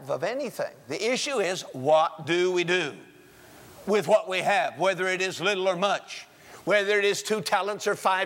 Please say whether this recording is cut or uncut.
uncut